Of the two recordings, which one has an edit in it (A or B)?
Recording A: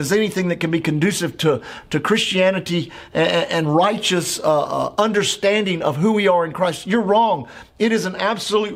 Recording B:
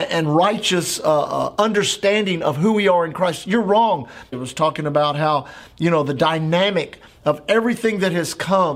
B